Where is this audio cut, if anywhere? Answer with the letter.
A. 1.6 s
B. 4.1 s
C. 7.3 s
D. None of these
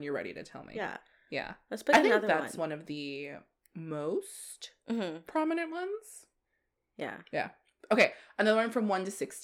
D